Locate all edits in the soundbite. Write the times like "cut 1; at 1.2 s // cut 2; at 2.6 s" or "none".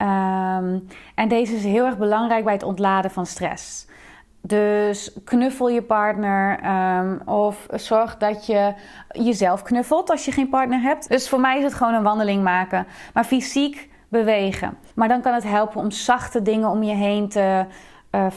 cut 1; at 11.1 s // cut 2; at 14.9 s